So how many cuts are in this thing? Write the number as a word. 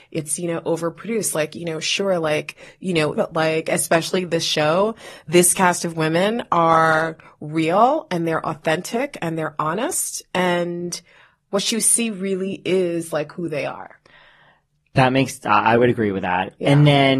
one